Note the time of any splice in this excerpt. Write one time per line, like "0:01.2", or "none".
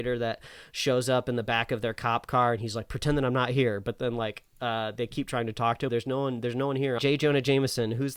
0:05.9
0:07.0